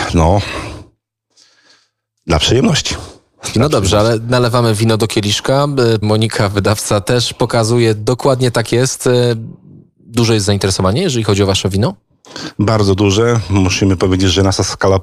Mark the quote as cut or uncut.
cut